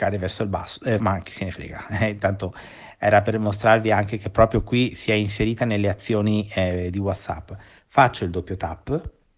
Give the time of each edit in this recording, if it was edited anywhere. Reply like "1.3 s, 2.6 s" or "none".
1.0 s